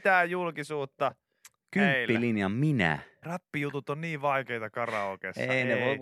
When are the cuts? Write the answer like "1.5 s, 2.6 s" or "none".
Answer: 3.2 s